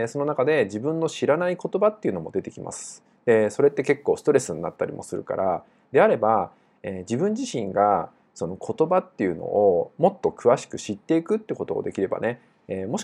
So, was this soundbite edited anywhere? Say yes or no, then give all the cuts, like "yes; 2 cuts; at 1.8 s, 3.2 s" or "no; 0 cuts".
yes; 1 cut; at 3.2 s